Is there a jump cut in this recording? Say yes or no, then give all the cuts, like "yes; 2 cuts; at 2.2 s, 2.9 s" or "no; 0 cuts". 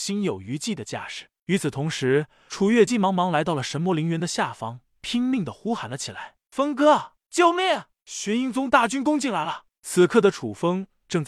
yes; 1 cut; at 2.9 s